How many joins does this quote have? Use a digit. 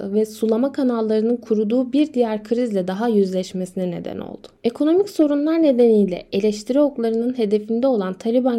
0